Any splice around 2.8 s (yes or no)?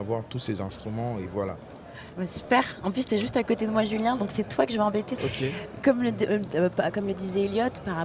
no